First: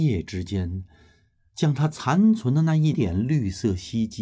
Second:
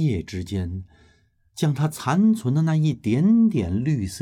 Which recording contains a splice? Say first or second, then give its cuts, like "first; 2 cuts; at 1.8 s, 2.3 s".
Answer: first; 1 cut; at 2.9 s